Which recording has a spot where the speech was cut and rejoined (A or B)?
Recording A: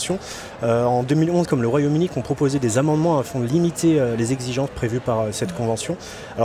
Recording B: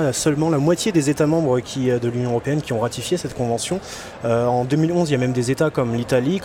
A